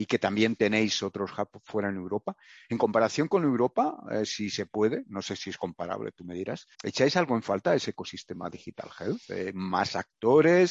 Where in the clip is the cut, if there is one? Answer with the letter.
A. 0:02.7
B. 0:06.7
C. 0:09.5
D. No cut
B